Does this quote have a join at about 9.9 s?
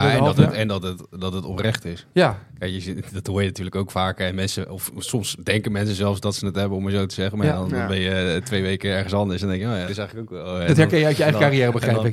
yes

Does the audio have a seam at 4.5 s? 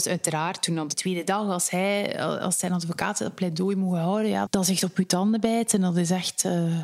yes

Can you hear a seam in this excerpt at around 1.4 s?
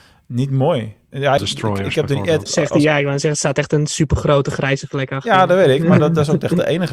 yes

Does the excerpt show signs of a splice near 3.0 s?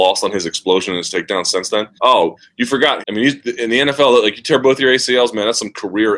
yes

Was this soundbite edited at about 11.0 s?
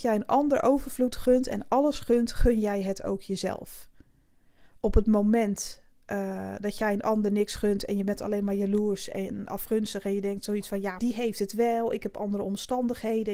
yes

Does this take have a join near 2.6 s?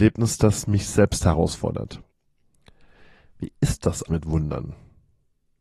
no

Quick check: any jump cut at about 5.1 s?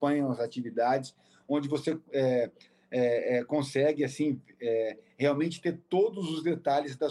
no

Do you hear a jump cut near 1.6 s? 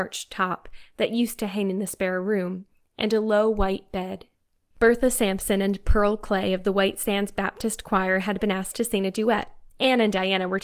no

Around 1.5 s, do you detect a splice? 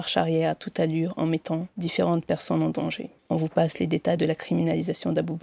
no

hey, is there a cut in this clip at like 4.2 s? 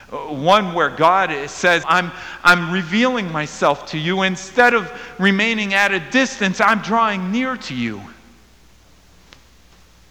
no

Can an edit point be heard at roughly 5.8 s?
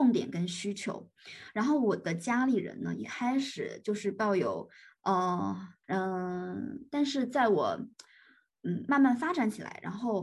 yes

